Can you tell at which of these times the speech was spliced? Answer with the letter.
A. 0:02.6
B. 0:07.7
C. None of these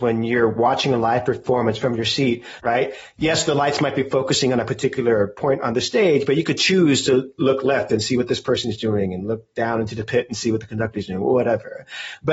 A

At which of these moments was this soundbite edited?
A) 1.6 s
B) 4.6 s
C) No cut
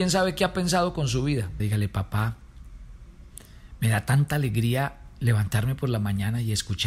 A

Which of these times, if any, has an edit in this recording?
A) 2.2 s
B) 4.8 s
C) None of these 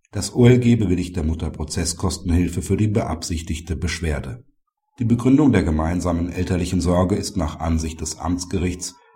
B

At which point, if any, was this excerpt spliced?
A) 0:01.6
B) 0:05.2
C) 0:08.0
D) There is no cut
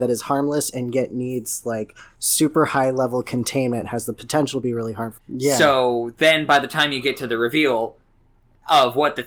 B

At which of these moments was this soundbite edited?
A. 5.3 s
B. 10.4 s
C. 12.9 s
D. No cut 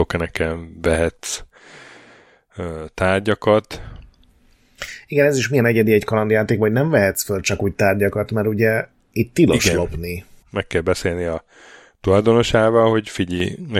B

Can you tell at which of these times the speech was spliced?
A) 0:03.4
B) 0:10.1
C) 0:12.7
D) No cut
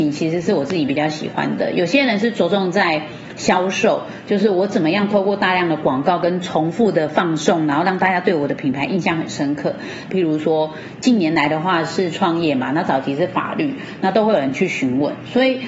B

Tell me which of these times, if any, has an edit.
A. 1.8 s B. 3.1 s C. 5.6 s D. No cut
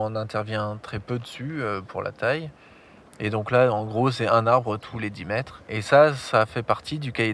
D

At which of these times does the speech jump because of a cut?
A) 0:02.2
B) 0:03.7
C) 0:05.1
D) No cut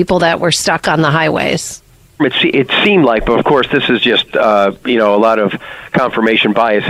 A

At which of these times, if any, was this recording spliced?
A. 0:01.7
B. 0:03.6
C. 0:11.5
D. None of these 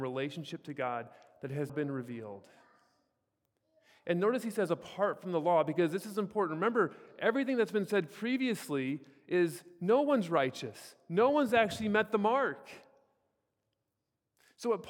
A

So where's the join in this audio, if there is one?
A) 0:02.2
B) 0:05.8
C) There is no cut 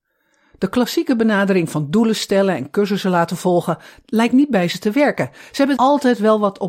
B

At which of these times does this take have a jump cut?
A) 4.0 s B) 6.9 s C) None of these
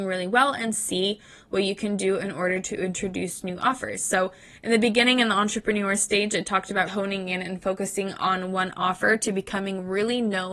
B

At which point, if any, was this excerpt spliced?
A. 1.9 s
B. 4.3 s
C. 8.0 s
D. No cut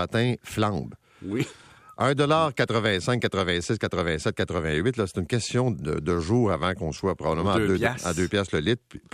D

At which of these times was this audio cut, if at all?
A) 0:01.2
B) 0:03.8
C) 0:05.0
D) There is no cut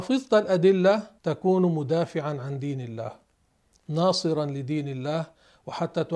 A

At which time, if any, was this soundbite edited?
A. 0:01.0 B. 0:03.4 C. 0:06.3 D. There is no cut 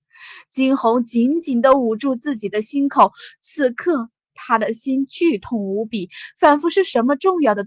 D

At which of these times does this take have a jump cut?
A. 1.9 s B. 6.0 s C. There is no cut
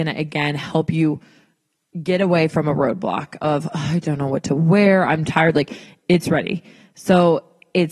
B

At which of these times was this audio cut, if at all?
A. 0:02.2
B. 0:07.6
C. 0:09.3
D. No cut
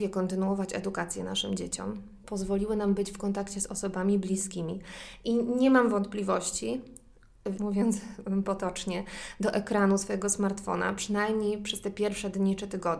B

